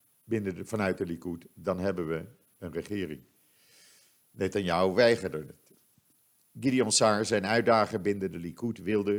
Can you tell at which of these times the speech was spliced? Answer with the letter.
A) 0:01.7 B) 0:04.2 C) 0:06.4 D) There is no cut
D